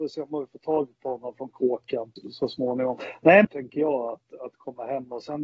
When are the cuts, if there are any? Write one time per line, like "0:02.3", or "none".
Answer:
0:02.2
0:03.4